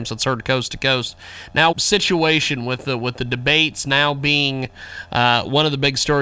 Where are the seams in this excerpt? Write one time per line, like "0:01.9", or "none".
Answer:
0:01.7